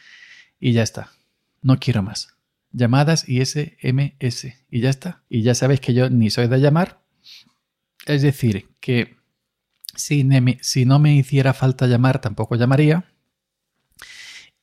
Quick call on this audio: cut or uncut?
cut